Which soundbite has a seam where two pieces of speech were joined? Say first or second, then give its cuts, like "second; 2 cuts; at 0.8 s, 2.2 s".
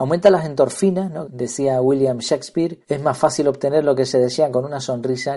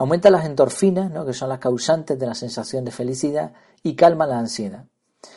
first; 2 cuts; at 1.2 s, 2.8 s